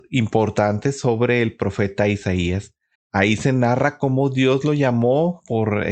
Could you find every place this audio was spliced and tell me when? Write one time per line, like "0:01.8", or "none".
0:02.9